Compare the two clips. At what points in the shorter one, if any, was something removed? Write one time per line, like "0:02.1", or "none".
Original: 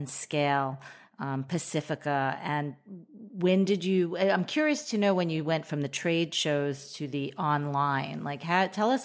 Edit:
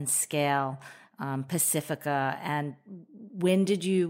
none